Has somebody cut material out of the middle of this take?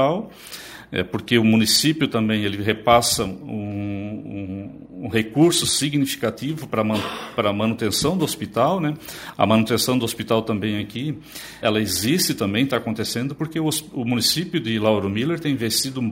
yes; 1 cut; at 11.6 s

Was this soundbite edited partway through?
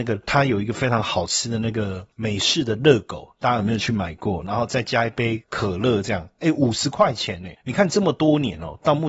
no; 0 cuts

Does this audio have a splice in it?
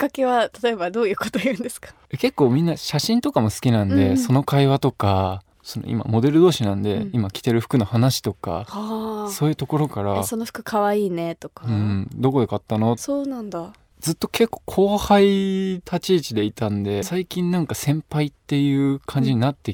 yes; 2 cuts; at 13.0 s, 17.0 s

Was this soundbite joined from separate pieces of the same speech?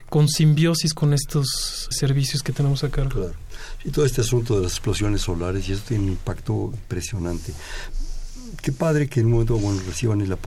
yes; 1 cut; at 1.9 s

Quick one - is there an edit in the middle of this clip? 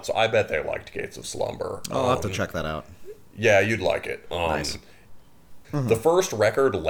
yes; 1 cut; at 5.6 s

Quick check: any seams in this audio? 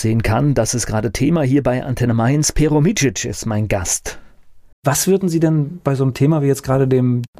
yes; 1 cut; at 4.7 s

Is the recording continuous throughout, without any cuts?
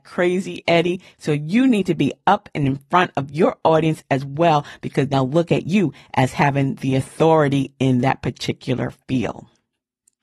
no; 2 cuts; at 1.1 s, 5.1 s

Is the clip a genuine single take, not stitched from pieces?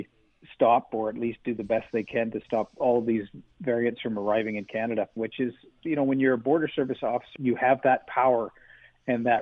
no; 2 cuts; at 5.2 s, 7.4 s

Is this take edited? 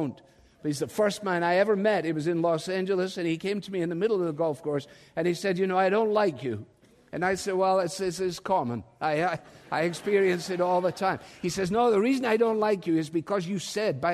no; 0 cuts

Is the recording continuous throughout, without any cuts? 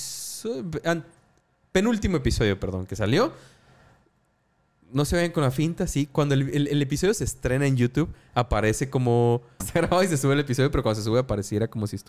no; 1 cut; at 9.6 s

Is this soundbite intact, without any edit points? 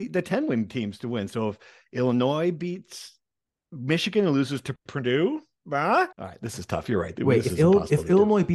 no; 1 cut; at 6.1 s

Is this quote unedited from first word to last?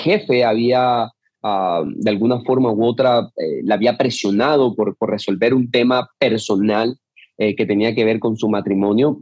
yes; 0 cuts

